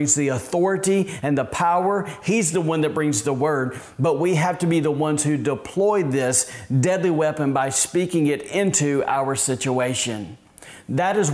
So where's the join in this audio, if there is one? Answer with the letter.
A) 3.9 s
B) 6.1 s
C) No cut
C